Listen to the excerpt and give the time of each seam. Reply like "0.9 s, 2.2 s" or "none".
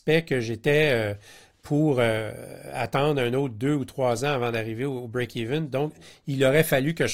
none